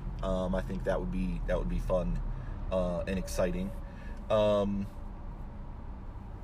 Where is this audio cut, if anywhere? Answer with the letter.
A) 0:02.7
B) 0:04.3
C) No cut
C